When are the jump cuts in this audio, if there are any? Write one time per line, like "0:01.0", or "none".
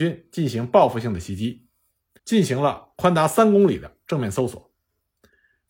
0:02.2